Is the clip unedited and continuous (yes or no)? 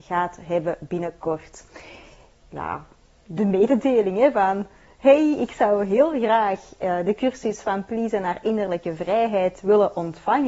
no